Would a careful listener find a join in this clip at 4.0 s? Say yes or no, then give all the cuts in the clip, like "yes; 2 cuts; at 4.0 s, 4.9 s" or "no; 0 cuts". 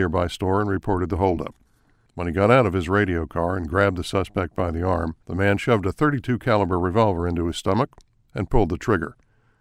no; 2 cuts; at 2.1 s, 5.2 s